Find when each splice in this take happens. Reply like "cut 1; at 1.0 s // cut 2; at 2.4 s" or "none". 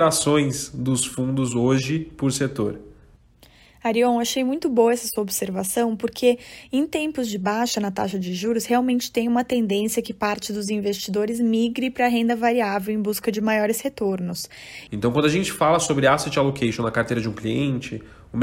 cut 1; at 14.9 s